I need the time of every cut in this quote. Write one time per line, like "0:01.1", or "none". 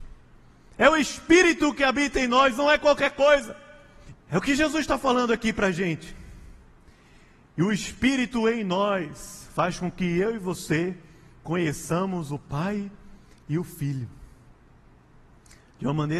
0:04.1